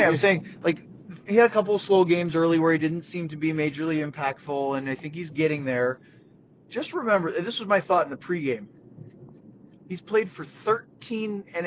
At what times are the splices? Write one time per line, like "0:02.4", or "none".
none